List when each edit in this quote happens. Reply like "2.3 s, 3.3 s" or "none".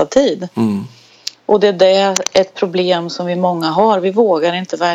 none